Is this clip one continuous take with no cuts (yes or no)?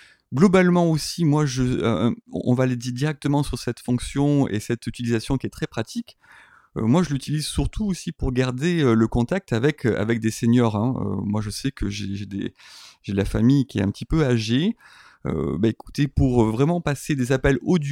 yes